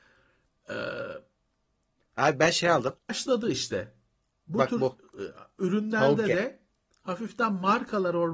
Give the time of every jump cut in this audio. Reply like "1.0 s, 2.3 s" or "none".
3.1 s